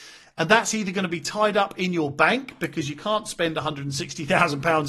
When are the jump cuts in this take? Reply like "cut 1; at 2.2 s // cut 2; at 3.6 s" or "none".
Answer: none